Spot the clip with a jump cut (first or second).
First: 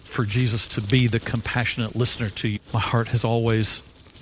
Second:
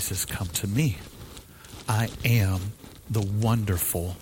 first